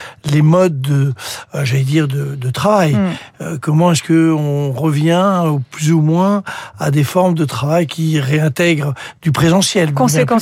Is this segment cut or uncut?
uncut